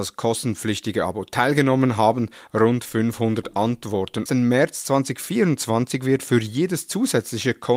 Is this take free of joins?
no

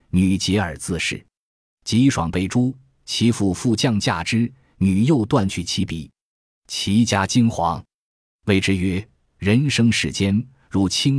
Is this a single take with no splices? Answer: yes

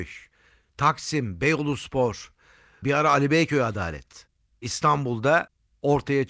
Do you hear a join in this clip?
yes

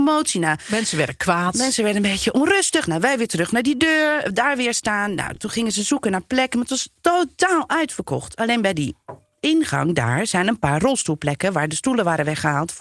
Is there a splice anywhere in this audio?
no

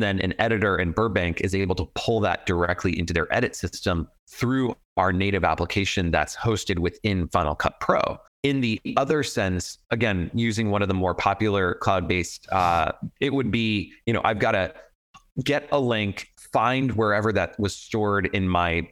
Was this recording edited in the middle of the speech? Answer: yes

